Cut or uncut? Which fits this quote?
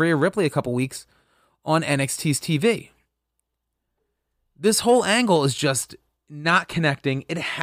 uncut